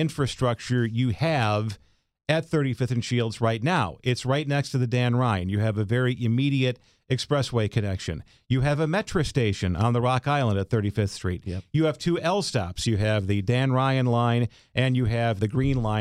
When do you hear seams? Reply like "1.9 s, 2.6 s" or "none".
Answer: none